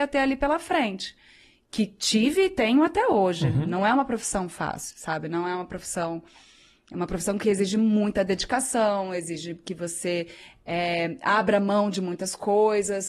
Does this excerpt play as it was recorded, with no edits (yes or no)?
yes